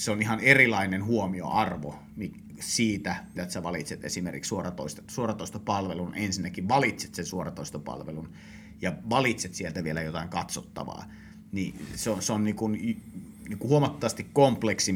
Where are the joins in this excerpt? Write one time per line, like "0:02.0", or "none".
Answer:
0:03.3